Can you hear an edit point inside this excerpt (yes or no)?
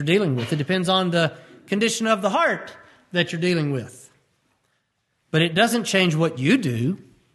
no